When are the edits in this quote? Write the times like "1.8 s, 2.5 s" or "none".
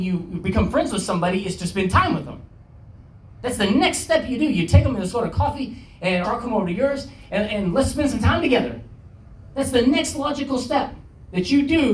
6.2 s

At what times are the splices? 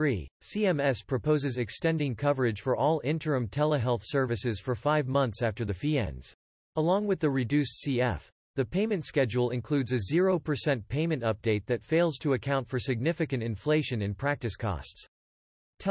6.6 s

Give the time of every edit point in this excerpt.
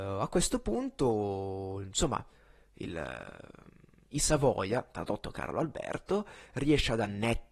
none

